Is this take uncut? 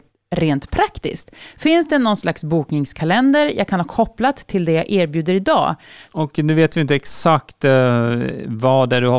no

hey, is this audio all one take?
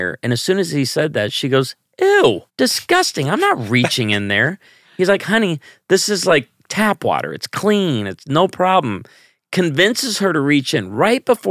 no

